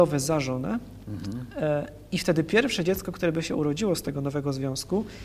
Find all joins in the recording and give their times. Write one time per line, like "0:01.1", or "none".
none